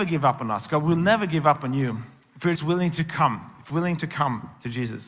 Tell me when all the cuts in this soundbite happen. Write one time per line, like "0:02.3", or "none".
0:02.6
0:03.7

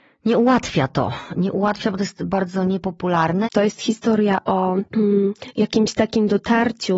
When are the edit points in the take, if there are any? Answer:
0:03.4
0:04.9

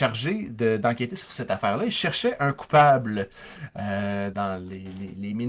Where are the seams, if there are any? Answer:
0:04.3

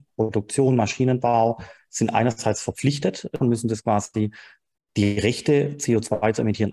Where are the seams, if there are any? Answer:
0:03.4

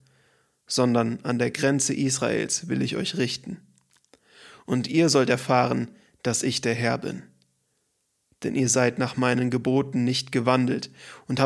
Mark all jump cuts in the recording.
none

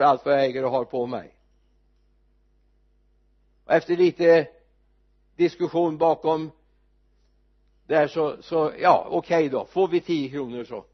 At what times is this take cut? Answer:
none

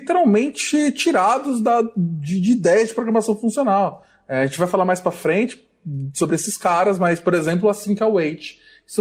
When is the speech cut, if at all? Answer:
none

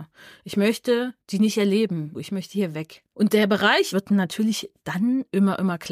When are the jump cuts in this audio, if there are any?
0:02.1
0:03.9

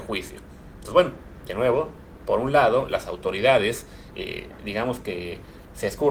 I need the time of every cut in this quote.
none

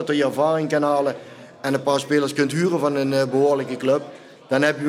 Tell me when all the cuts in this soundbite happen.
none

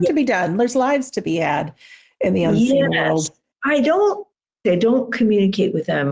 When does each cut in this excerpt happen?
0:04.6

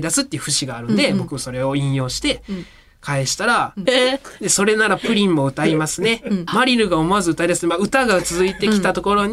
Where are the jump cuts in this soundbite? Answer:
0:03.9
0:06.5

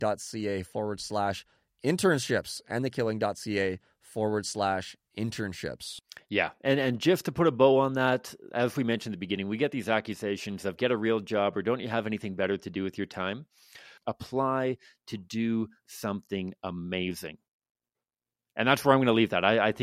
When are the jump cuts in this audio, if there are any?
0:14.0

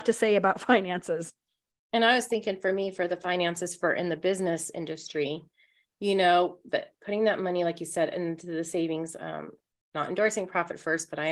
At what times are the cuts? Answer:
0:06.7

